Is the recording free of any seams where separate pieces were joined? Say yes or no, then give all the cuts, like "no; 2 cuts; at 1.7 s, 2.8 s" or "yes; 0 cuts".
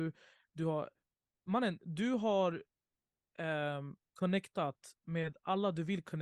yes; 0 cuts